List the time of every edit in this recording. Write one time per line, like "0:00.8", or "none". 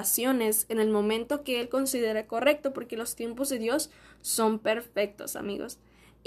none